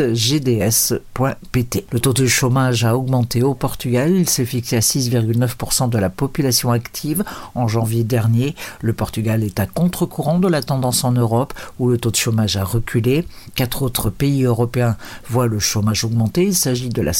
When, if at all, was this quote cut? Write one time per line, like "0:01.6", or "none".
none